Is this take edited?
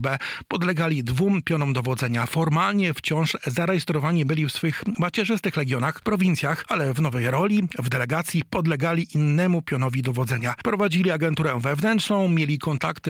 no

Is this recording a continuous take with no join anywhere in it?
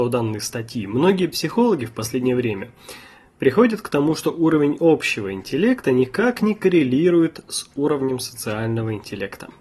yes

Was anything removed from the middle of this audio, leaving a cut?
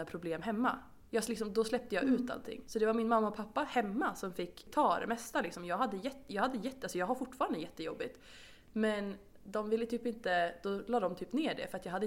no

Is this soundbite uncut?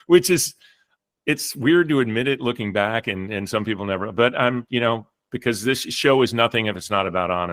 yes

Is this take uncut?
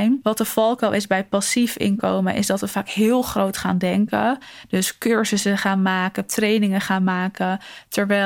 yes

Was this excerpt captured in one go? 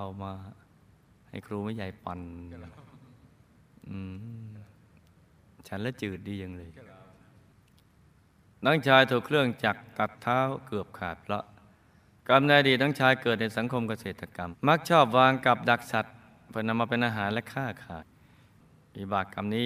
no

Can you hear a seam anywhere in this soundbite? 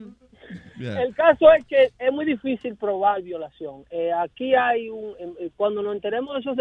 no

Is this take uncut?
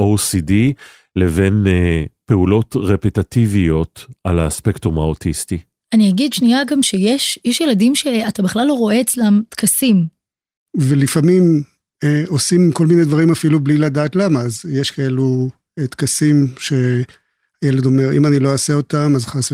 no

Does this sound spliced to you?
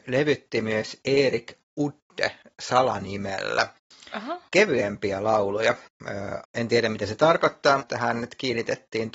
yes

